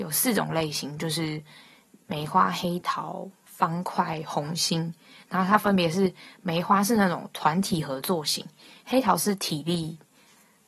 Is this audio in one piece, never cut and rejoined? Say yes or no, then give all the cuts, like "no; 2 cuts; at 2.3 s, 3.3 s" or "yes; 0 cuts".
yes; 0 cuts